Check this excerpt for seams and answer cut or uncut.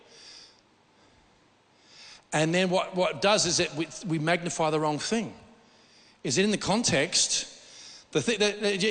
uncut